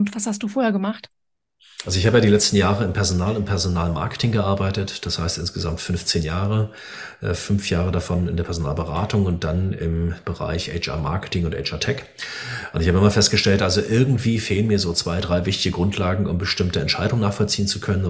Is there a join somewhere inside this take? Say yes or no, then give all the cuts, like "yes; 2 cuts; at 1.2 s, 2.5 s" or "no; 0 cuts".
no; 0 cuts